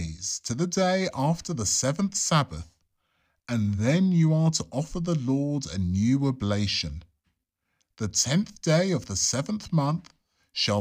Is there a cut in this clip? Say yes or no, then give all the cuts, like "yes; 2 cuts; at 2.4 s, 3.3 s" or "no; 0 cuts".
no; 0 cuts